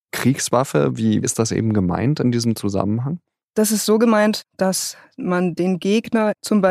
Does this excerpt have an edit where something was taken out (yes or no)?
no